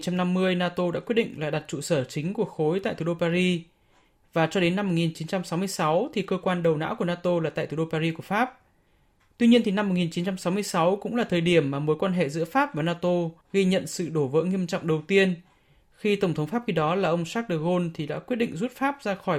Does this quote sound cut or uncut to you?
cut